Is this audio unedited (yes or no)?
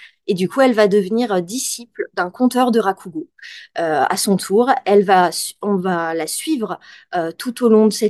yes